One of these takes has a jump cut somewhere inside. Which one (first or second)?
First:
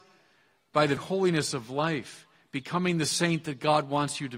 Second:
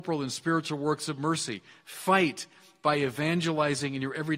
first